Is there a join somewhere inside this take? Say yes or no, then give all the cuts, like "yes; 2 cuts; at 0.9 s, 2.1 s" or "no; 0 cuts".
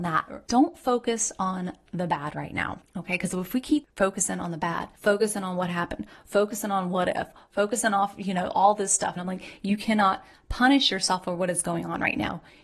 yes; 1 cut; at 9.2 s